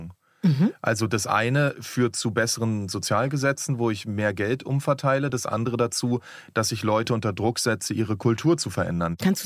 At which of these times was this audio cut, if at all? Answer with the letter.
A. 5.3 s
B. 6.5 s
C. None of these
C